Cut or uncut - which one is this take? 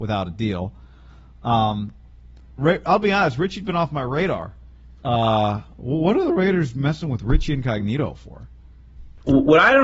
cut